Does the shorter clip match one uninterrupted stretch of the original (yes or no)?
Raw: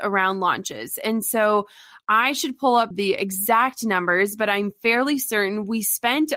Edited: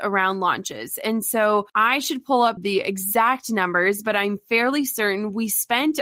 no